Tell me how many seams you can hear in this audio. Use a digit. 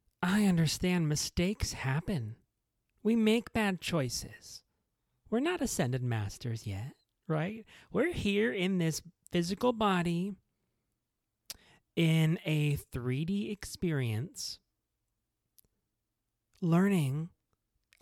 1